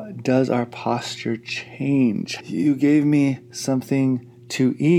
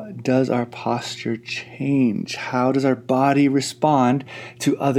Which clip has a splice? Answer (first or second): first